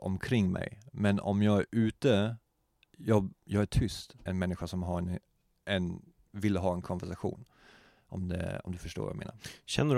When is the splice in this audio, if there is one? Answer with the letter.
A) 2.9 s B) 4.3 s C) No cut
B